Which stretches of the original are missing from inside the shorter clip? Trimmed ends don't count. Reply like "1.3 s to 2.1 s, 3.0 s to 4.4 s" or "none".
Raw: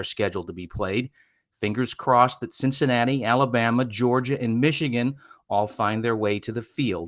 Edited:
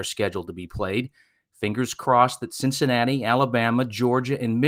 none